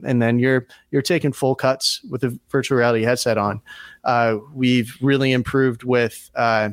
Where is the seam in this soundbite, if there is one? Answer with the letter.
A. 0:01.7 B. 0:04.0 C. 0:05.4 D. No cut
B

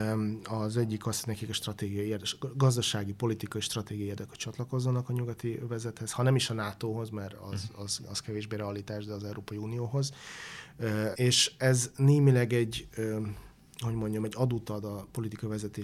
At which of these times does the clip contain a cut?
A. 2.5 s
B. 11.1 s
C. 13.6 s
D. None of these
B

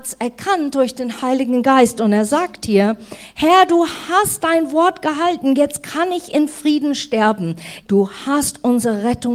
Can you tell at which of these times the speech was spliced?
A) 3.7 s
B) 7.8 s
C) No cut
B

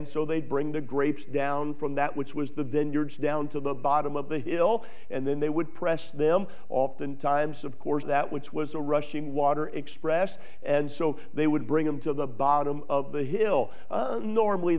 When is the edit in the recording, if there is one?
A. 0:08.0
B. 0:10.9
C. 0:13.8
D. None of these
A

